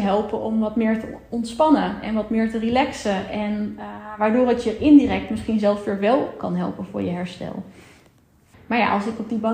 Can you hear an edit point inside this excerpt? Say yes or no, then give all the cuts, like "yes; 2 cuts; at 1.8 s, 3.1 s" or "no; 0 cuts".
yes; 1 cut; at 8.5 s